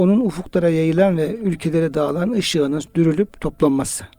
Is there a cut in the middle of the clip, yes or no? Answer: no